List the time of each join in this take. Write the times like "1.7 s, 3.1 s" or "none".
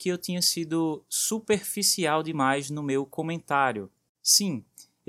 4.1 s